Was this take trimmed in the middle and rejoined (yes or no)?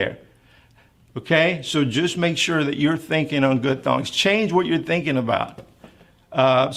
no